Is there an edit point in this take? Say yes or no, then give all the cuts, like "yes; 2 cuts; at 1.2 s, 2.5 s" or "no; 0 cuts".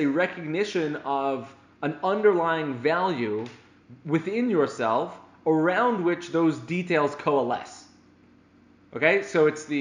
no; 0 cuts